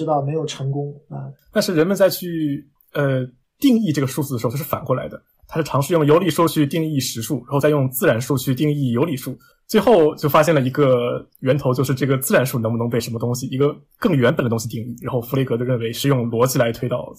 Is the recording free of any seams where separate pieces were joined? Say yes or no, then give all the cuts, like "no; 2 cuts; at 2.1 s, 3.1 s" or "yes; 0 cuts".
no; 1 cut; at 1.4 s